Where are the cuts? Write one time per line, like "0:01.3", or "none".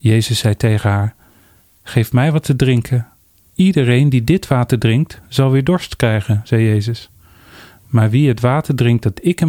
0:03.4